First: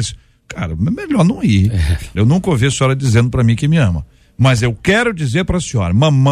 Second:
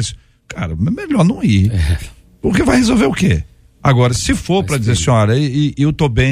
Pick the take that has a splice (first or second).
first